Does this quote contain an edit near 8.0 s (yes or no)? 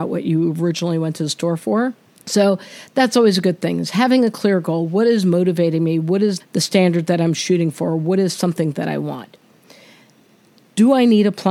no